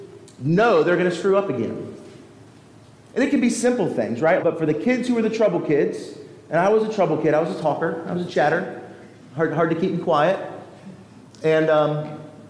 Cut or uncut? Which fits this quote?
cut